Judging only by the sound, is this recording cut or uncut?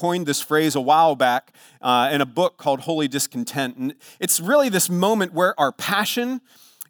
uncut